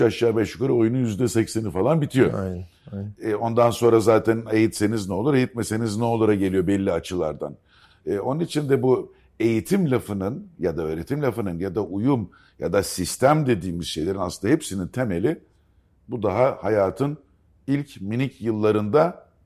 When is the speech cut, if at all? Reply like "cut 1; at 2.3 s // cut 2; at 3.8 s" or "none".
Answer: none